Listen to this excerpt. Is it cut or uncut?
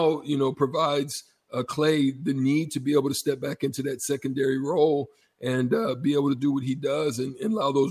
uncut